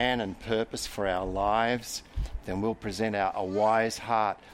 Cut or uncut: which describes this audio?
uncut